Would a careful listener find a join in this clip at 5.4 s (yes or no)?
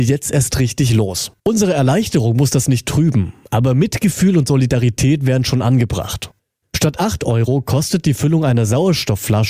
no